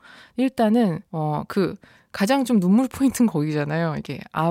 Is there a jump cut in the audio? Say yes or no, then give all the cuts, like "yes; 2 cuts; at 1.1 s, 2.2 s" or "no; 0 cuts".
yes; 1 cut; at 1.1 s